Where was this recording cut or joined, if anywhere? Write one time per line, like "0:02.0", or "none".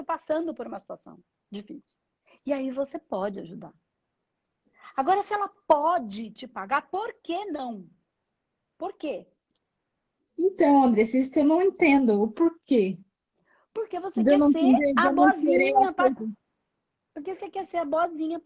0:16.2